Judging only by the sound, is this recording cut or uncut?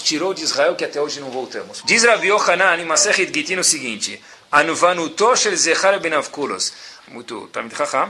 cut